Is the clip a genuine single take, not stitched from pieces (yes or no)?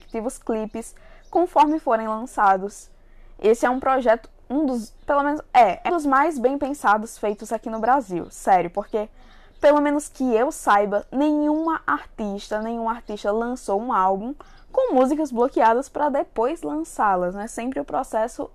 no